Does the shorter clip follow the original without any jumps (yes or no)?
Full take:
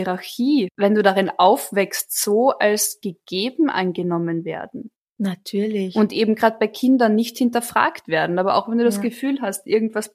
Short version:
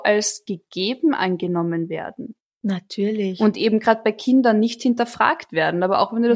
yes